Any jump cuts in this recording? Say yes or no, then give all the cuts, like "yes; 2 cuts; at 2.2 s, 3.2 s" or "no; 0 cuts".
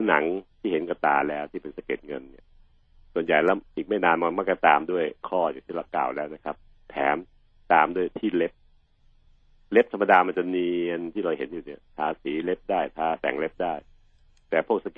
no; 0 cuts